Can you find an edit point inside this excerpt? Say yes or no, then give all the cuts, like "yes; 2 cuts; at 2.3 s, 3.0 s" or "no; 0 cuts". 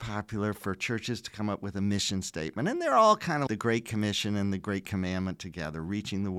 yes; 1 cut; at 3.5 s